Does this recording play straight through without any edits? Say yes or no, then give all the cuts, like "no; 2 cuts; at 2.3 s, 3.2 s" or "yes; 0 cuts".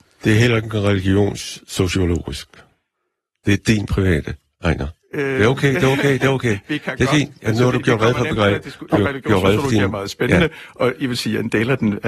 yes; 0 cuts